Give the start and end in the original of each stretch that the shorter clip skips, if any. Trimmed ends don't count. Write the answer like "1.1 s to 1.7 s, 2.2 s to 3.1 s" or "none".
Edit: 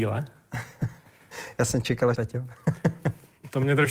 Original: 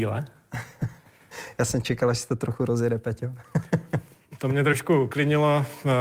2.1 s to 3.0 s